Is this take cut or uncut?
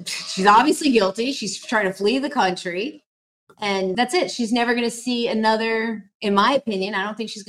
cut